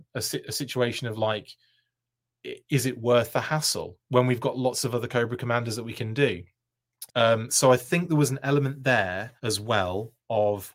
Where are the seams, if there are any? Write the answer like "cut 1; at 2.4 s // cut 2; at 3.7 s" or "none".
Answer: cut 1; at 7.1 s // cut 2; at 9.4 s